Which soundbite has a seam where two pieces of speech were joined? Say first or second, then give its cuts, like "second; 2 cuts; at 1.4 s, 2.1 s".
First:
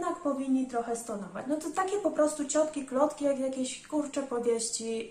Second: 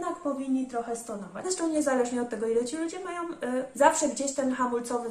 second; 2 cuts; at 1.4 s, 3.7 s